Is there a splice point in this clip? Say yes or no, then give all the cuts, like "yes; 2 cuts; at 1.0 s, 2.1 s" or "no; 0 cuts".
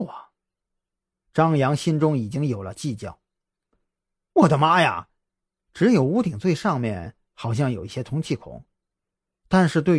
yes; 1 cut; at 5.6 s